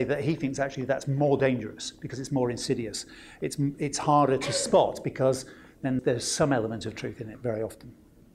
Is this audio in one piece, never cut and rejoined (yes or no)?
no